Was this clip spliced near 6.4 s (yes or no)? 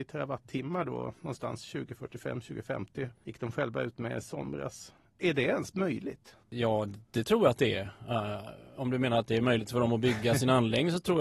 yes